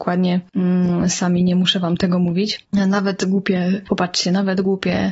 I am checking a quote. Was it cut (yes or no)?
yes